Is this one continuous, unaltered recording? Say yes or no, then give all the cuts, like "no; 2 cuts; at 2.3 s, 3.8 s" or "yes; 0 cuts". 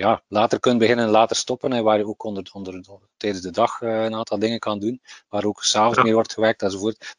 yes; 0 cuts